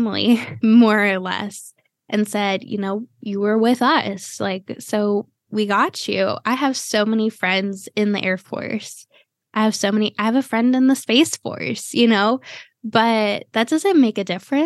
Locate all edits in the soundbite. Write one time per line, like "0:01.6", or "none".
0:05.5

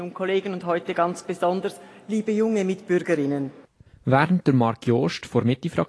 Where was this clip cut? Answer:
0:03.9

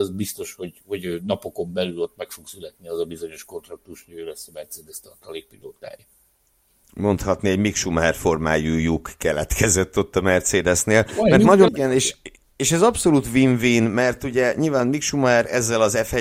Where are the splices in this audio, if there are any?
0:11.7

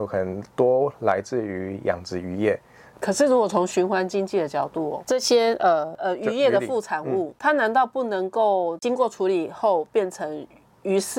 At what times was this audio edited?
0:02.9

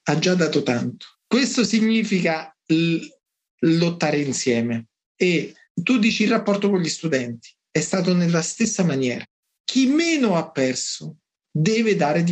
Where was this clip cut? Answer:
0:01.1
0:09.6

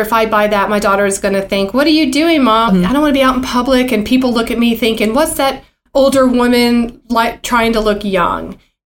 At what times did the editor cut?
0:02.7

